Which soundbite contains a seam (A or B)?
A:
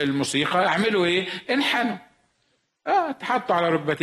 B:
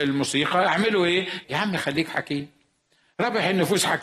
B